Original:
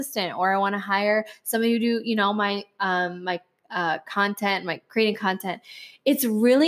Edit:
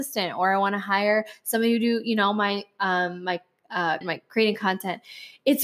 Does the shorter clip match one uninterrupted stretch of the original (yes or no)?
no